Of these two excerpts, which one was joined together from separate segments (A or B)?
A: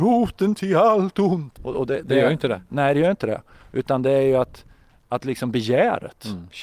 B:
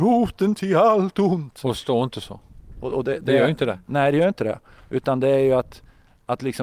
A